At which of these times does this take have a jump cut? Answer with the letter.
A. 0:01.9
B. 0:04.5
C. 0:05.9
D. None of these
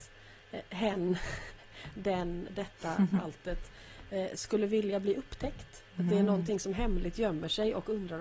C